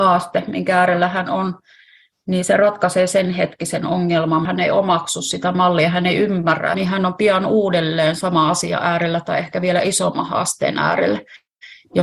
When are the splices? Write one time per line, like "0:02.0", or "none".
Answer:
0:04.4
0:06.7